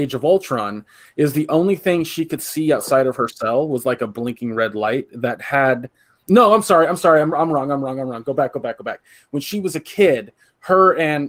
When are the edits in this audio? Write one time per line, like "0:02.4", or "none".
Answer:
none